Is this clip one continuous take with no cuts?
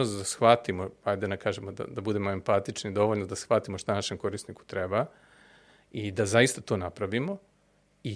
yes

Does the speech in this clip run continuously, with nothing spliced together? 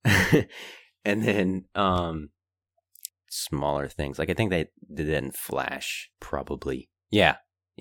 no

